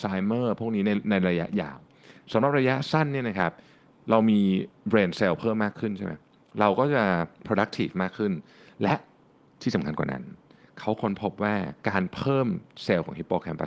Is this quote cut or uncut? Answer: cut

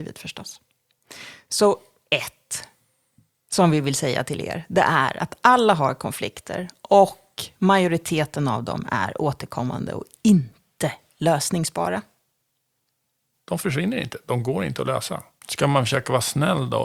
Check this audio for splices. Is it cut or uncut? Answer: cut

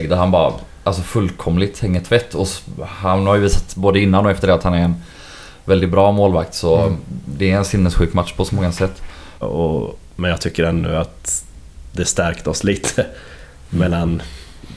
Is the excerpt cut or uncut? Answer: cut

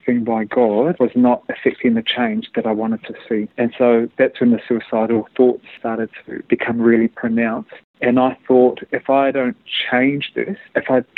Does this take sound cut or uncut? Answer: cut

